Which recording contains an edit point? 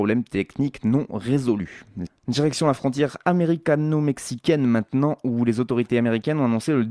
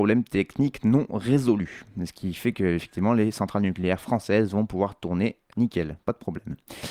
first; 1 cut; at 2.1 s

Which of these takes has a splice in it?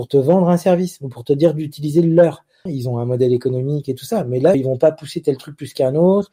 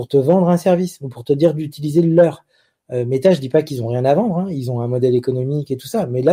first; 2 cuts; at 2.7 s, 4.5 s

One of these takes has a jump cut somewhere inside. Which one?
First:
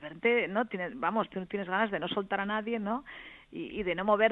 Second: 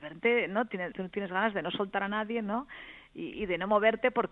second; 1 cut; at 0.9 s

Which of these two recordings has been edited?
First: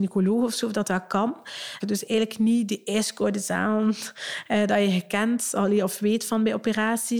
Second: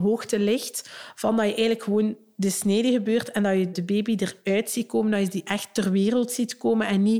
first; 1 cut; at 1.8 s

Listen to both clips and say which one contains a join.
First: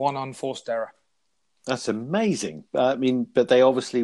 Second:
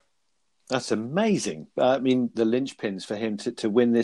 second; 1 cut; at 2.3 s

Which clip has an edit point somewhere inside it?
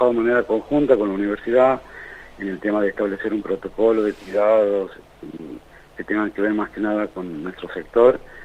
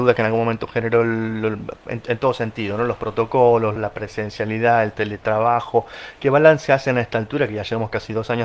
second; 1 cut; at 3.8 s

